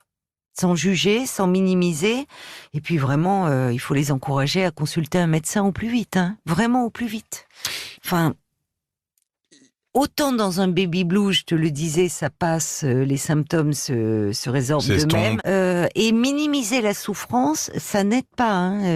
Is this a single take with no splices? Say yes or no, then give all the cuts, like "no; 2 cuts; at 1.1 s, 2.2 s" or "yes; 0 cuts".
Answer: no; 2 cuts; at 7.9 s, 15.4 s